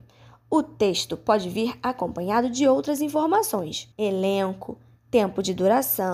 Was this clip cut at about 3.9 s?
yes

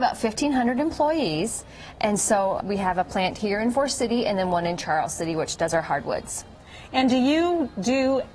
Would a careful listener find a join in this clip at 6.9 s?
no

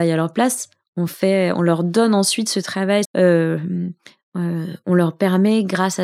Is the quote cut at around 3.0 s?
yes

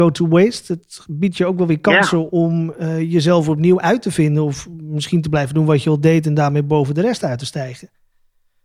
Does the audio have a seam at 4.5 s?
no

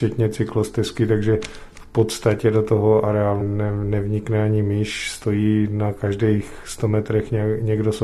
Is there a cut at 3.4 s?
yes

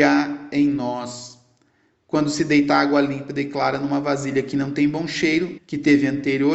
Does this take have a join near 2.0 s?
no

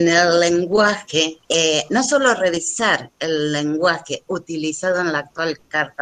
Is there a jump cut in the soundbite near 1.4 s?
yes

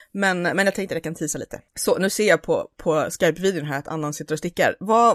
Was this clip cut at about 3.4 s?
no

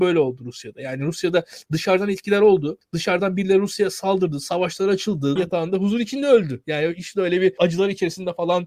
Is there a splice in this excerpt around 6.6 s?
no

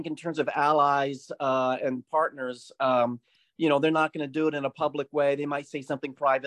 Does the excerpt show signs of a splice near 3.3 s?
no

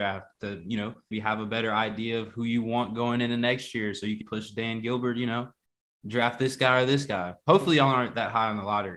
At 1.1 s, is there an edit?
yes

